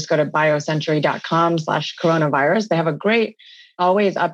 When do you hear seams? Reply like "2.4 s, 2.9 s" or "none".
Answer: none